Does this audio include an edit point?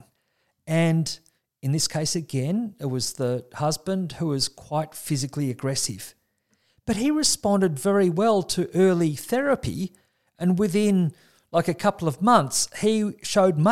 no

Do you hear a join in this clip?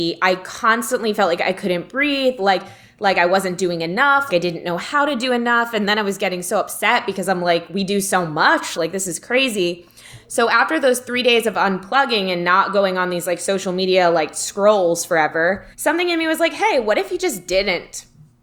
yes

